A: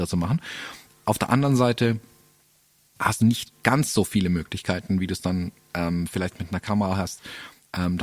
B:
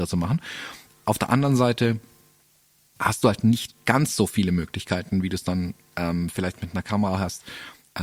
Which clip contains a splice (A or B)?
A